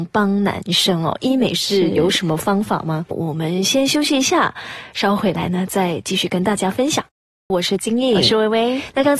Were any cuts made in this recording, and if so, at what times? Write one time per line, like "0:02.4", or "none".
0:03.1
0:07.5

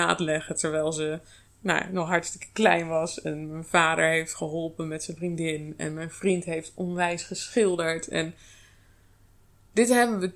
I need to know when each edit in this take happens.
none

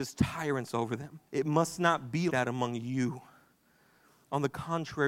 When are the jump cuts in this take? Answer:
0:01.3
0:02.3

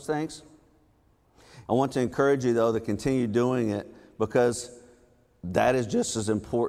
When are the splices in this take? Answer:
0:01.7

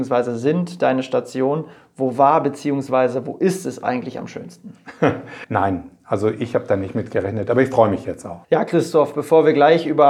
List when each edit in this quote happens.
0:05.4
0:08.4

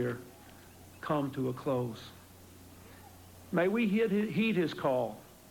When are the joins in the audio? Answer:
none

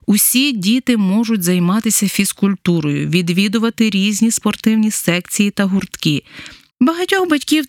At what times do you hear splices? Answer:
0:06.7

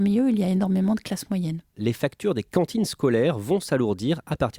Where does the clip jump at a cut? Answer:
0:01.7

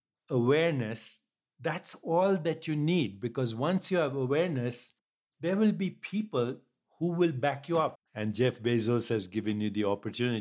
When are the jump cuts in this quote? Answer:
0:08.0

